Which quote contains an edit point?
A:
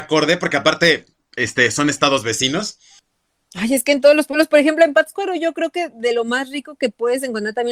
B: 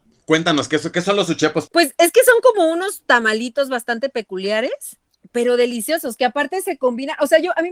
B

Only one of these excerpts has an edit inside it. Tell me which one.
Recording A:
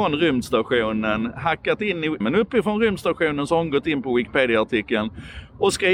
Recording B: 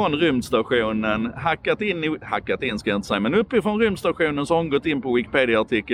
A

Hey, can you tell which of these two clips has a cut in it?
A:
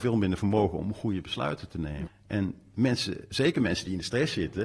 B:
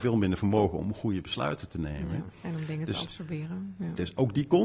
A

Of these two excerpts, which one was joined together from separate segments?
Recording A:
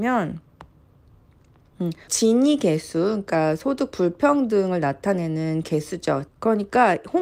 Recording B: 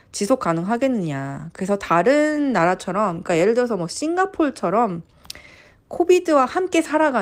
A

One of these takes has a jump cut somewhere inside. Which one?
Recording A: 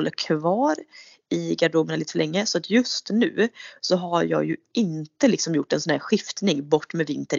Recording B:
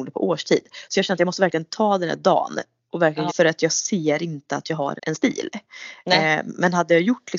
B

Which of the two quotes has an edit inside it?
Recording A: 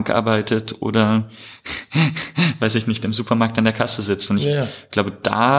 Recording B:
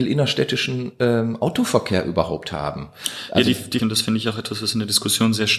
B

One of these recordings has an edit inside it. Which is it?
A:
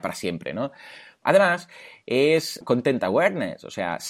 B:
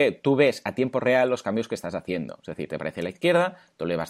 A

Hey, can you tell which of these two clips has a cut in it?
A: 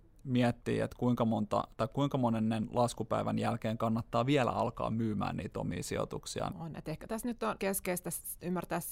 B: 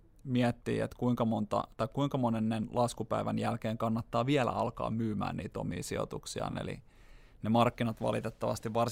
A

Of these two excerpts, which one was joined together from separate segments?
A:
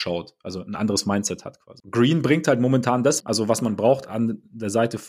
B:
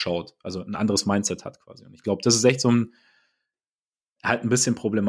A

